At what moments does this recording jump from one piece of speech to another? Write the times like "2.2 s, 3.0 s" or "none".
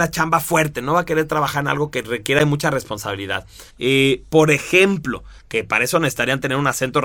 3.7 s, 5.4 s